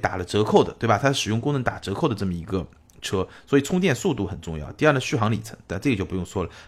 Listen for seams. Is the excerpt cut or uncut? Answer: uncut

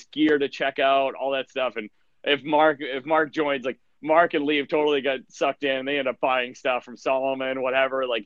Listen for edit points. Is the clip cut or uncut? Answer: uncut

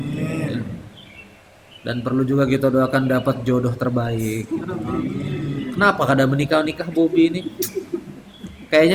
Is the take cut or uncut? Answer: uncut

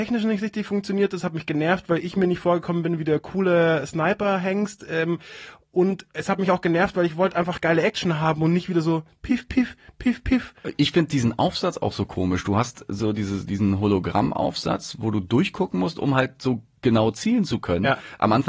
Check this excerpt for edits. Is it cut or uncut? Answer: uncut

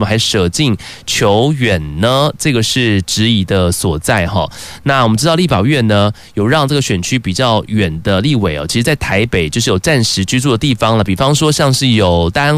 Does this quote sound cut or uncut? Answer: uncut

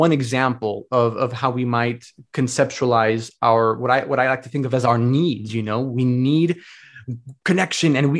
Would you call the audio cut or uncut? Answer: uncut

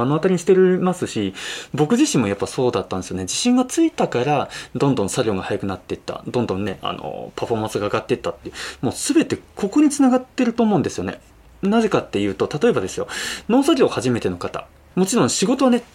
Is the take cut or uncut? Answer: cut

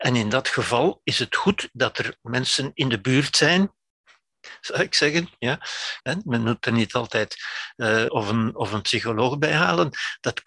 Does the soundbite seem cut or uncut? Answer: cut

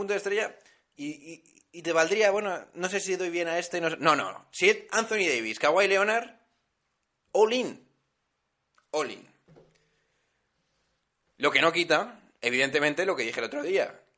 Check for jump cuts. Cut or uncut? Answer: uncut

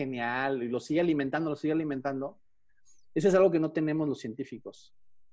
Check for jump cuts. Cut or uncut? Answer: uncut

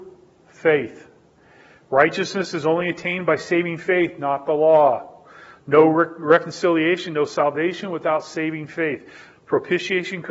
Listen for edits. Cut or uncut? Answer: uncut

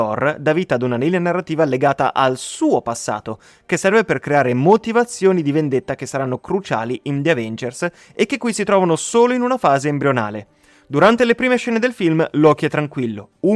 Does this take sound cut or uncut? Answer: uncut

